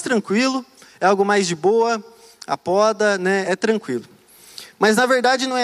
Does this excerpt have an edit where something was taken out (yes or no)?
yes